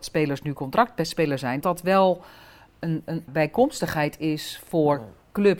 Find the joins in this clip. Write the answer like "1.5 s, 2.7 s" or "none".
1.6 s, 3.3 s